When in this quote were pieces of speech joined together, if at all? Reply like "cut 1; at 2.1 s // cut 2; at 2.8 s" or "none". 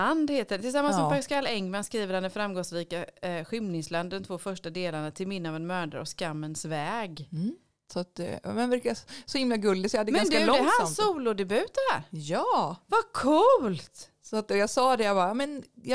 none